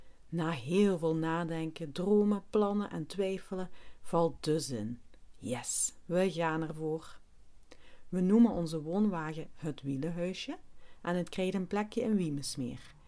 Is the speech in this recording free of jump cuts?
yes; 0 cuts

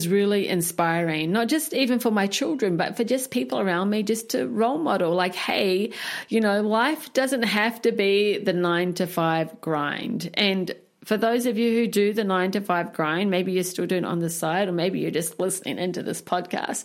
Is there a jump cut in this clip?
no; 0 cuts

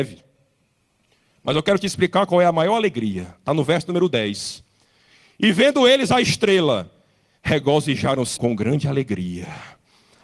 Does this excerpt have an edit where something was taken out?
yes; 1 cut; at 8.4 s

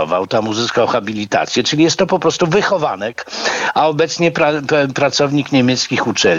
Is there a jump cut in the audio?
no; 0 cuts

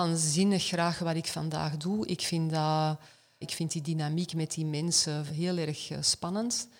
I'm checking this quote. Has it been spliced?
yes; 2 cuts; at 3.4 s, 5.3 s

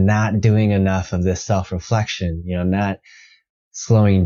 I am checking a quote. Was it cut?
no; 0 cuts

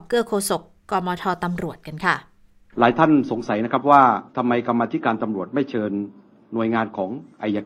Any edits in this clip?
yes; 1 cut; at 4.3 s

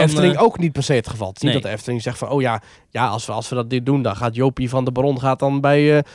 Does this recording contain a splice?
no; 0 cuts

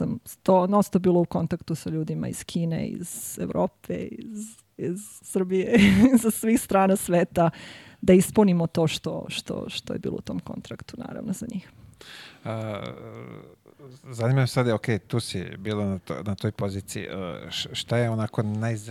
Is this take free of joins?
yes; 0 cuts

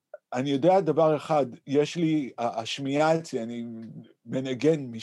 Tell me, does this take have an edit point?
no; 0 cuts

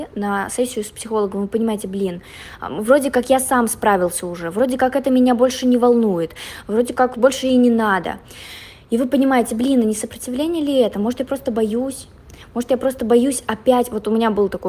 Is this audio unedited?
no; 1 cut; at 7.1 s

